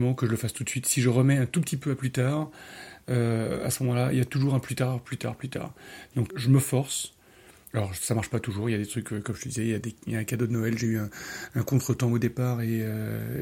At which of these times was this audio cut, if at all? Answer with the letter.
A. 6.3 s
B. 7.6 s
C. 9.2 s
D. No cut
A